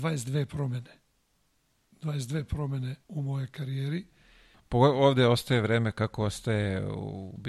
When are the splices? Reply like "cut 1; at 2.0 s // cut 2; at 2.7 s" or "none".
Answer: cut 1; at 3.0 s // cut 2; at 4.5 s